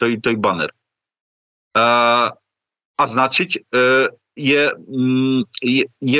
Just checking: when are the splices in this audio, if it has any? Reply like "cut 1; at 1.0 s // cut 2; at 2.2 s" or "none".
cut 1; at 4.4 s